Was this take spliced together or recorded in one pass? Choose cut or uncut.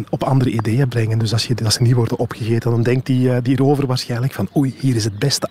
uncut